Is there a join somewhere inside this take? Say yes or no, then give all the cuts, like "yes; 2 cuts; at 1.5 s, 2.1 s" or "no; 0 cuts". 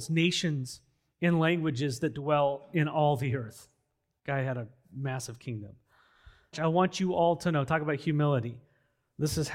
yes; 1 cut; at 6.5 s